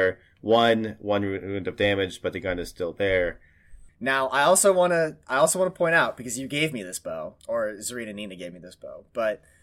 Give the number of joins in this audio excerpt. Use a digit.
2